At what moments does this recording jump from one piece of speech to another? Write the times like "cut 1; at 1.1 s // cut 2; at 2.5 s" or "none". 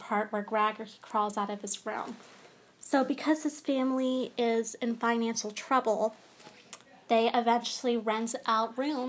none

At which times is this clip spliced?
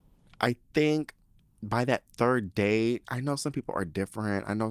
none

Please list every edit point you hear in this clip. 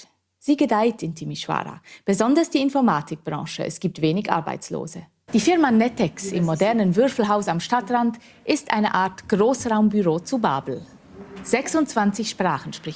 cut 1; at 5.3 s

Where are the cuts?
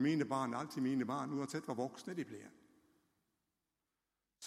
none

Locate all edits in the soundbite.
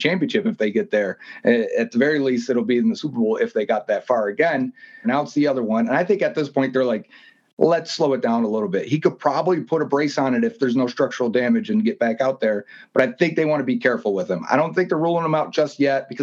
cut 1; at 5.0 s

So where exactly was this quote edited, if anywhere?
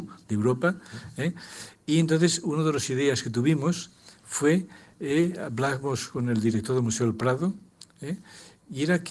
none

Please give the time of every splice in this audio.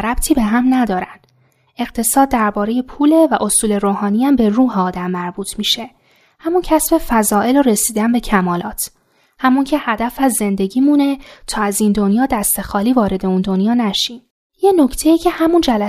cut 1; at 14.5 s

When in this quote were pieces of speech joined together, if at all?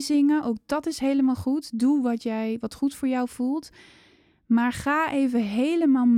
none

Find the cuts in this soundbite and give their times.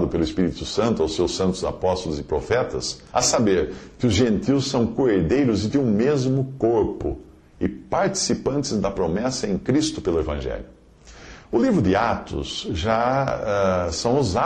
cut 1; at 3.1 s

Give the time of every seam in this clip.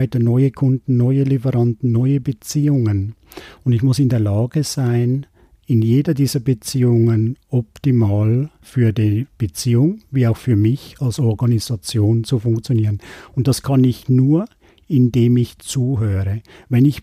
none

